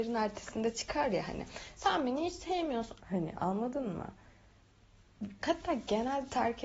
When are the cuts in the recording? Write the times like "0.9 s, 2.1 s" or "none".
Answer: 3.0 s, 5.4 s